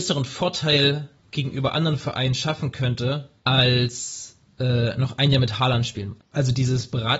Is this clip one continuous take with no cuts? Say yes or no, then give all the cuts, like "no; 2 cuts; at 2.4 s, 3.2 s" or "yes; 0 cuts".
no; 2 cuts; at 3.4 s, 6.2 s